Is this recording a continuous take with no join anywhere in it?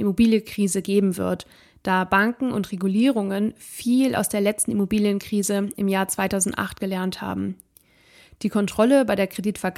yes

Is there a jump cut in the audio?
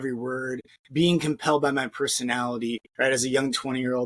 yes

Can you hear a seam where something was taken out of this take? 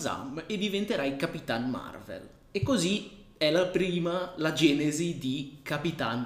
no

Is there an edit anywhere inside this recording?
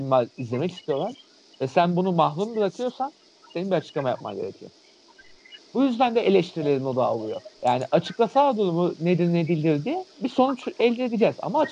yes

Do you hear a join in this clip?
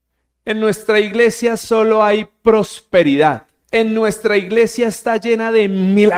yes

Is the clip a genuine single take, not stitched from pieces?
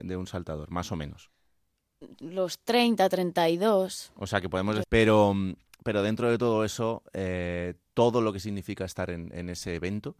no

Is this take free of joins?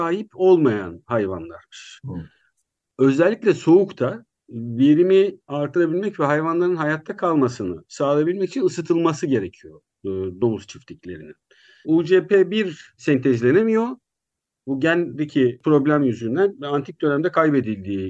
no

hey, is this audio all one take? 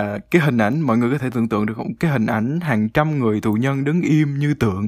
yes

